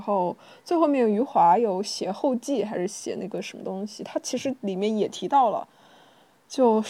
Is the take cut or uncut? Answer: uncut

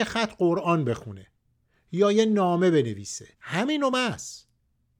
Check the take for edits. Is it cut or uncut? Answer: cut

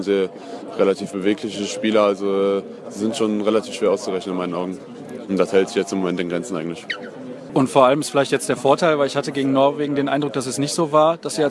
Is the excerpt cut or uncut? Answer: cut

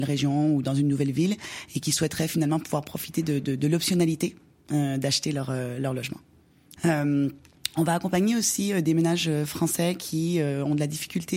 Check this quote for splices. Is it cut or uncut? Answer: cut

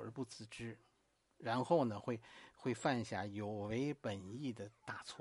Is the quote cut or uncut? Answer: uncut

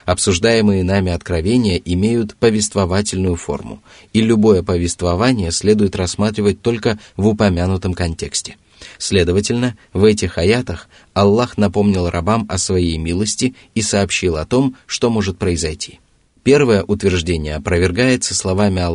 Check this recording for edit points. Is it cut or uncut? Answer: cut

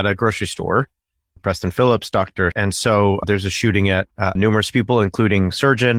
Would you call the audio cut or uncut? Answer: cut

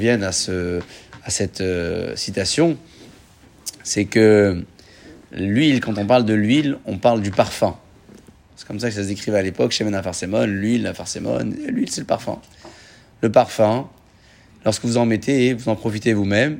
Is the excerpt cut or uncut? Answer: cut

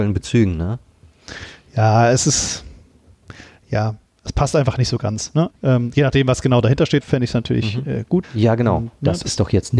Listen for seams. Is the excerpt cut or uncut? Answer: cut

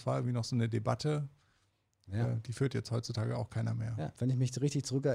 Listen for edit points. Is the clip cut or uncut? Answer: cut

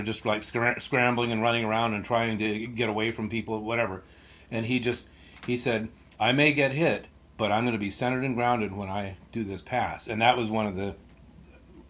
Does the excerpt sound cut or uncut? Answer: uncut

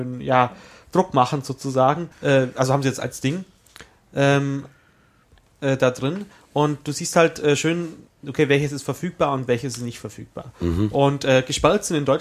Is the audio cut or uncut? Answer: cut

